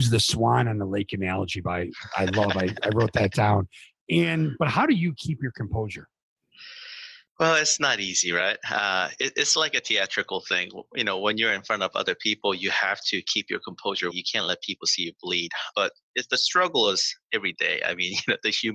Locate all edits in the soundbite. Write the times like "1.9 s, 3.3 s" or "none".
14.1 s, 15.7 s